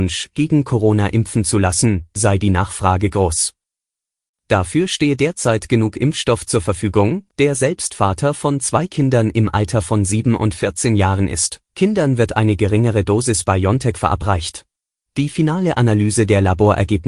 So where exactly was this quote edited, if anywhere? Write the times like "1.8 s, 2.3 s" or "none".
7.3 s, 11.7 s, 15.1 s